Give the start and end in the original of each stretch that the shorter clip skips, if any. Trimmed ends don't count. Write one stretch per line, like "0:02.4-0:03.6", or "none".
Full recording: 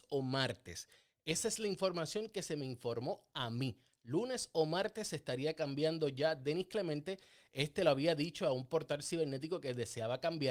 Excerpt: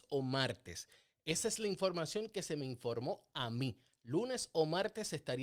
none